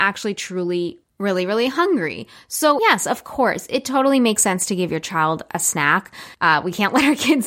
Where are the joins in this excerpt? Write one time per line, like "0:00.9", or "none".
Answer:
0:02.8
0:06.3